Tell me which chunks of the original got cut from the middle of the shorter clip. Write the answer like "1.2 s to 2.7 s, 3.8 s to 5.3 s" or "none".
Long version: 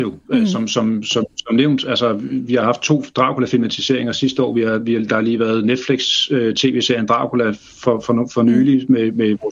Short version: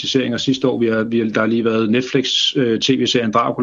none